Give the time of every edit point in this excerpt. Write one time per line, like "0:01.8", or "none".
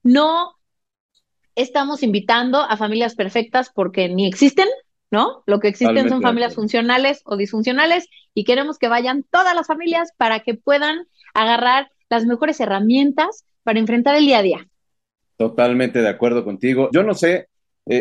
0:16.9